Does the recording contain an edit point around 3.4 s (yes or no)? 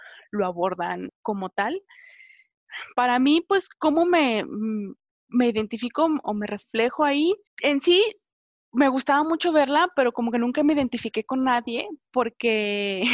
no